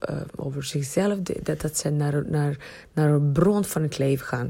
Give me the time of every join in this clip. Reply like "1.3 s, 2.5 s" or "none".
none